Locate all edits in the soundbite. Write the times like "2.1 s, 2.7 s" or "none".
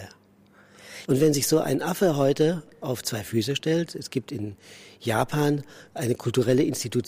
1.1 s

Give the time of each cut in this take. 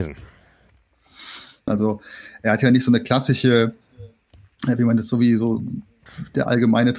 1.7 s

